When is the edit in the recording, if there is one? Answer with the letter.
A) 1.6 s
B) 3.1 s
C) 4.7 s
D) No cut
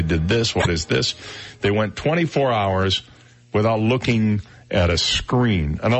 D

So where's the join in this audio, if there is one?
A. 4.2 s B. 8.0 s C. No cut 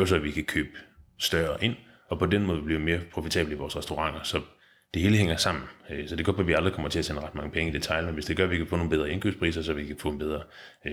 C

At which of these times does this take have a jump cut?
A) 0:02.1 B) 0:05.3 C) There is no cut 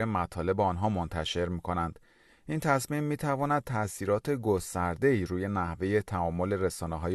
C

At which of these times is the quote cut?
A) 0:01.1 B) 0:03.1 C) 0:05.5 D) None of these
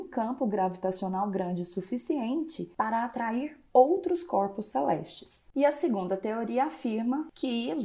C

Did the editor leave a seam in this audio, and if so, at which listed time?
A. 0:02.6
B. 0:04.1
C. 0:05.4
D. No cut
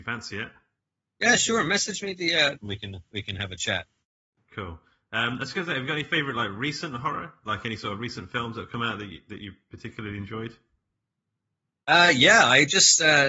A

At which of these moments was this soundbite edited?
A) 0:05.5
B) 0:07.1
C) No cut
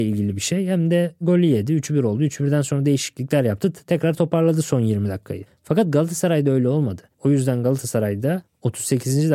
B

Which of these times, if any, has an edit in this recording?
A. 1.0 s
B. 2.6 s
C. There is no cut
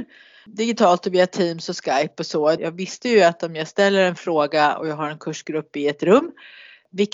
B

